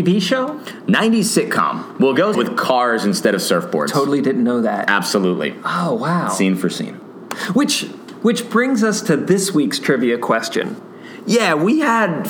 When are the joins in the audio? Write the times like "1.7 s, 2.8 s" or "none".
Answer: 2.3 s